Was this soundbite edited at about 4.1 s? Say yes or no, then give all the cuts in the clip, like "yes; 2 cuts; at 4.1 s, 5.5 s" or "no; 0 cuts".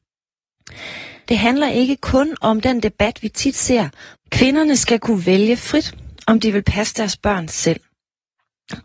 yes; 2 cuts; at 1.3 s, 4.1 s